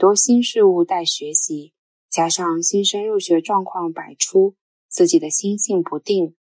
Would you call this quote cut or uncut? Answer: uncut